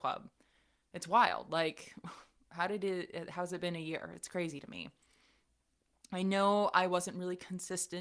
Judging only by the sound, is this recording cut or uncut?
uncut